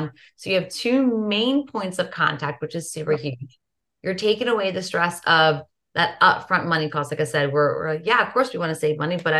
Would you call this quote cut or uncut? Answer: uncut